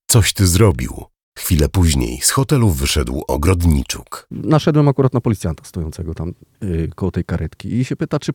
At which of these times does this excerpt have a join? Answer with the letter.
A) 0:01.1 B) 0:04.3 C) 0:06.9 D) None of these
D